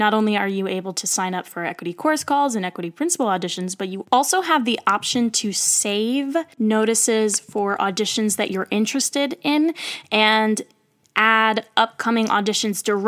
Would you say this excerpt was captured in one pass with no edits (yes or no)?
yes